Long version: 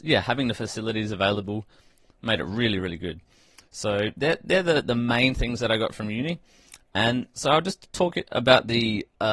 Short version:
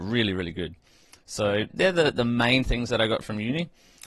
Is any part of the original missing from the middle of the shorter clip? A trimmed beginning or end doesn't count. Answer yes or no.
yes